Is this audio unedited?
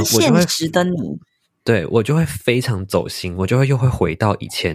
yes; 0 cuts

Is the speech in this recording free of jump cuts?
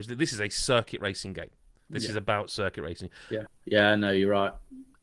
no; 1 cut; at 3.5 s

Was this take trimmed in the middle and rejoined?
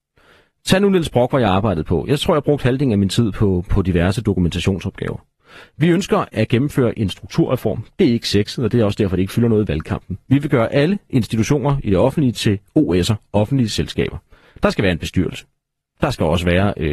no; 0 cuts

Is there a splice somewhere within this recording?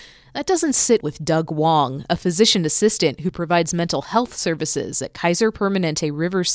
yes; 1 cut; at 1.0 s

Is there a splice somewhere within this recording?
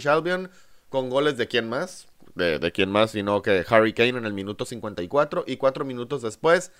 no; 0 cuts

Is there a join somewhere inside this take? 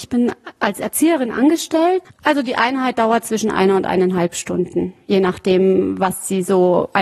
yes; 1 cut; at 2.0 s

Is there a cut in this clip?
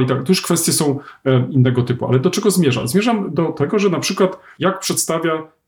no; 0 cuts

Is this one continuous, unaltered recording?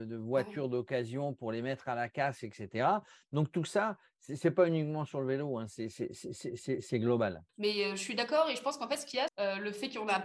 no; 2 cuts; at 7.5 s, 9.3 s

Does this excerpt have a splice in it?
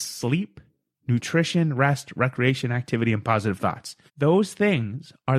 yes; 1 cut; at 4.1 s

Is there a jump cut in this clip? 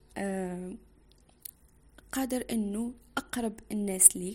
no; 0 cuts

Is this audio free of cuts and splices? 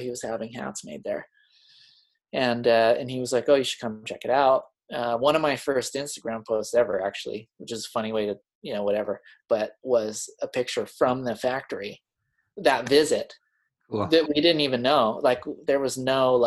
yes; 0 cuts

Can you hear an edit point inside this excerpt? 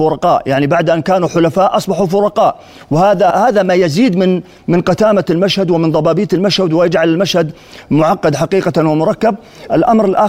yes; 1 cut; at 3.3 s

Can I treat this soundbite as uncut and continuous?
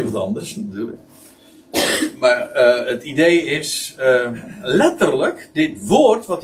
yes; 0 cuts

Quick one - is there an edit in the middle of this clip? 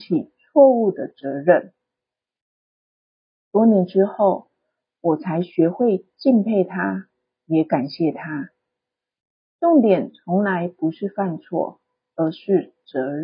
no; 0 cuts

